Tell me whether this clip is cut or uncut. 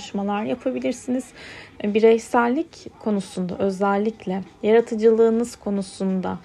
cut